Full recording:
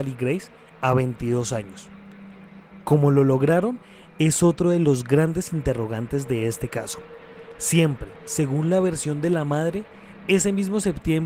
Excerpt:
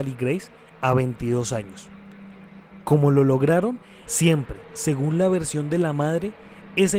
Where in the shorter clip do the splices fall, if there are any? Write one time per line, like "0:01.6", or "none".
0:04.1